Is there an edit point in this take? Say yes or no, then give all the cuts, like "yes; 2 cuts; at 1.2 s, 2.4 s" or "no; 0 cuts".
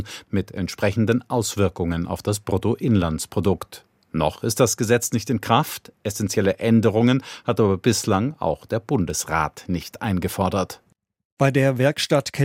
no; 0 cuts